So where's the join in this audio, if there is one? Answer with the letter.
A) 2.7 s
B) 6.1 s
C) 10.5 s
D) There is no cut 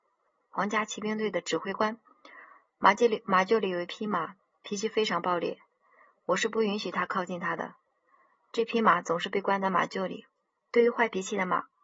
C